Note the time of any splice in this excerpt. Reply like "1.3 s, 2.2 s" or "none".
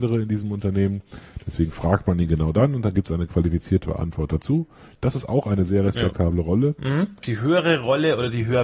7.2 s